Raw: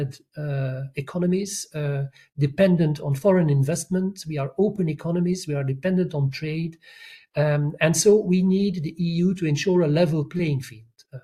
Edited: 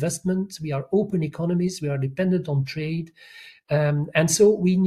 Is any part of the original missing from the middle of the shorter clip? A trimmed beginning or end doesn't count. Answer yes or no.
no